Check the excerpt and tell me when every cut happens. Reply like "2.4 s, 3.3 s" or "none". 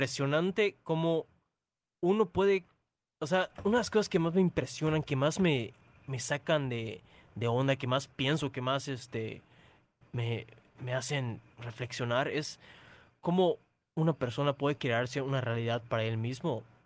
none